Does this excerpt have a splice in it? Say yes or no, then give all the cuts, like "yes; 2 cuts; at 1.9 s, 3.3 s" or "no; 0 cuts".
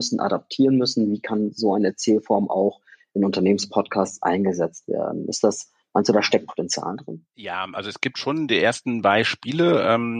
no; 0 cuts